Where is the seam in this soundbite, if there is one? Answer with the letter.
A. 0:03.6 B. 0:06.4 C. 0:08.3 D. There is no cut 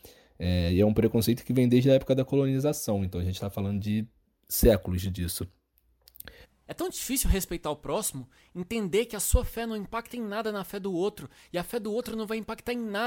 B